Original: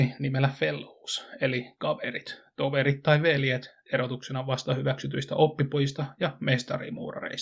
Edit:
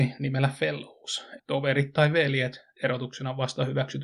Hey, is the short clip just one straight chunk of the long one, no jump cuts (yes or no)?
no